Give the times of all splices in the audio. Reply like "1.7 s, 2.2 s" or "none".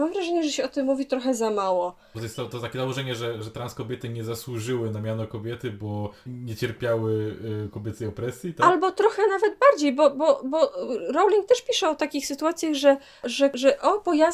2.1 s, 6.3 s